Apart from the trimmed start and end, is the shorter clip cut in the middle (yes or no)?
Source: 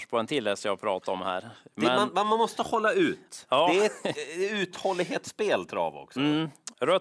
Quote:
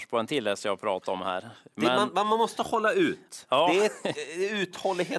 no